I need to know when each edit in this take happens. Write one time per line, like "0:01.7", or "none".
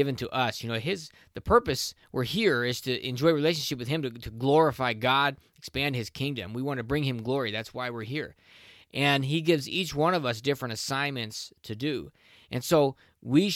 none